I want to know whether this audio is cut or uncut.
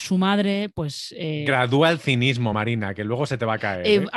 uncut